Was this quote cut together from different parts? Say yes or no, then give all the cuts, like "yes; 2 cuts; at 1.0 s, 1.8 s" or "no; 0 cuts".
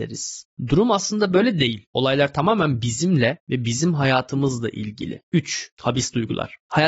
yes; 1 cut; at 5.2 s